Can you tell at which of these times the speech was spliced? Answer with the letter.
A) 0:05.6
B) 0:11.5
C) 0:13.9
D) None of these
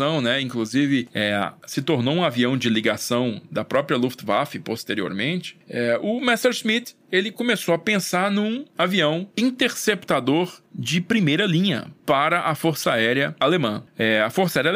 D